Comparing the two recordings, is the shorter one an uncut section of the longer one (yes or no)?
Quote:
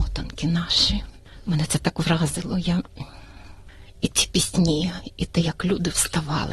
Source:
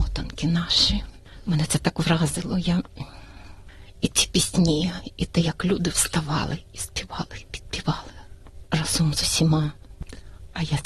yes